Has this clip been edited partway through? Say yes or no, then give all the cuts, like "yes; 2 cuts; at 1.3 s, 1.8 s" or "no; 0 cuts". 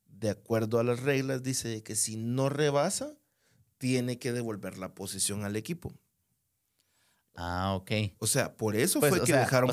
no; 0 cuts